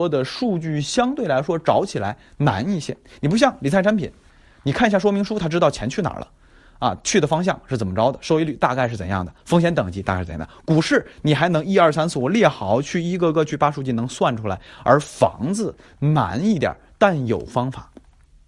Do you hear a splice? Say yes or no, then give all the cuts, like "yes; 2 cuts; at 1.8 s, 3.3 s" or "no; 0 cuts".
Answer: no; 0 cuts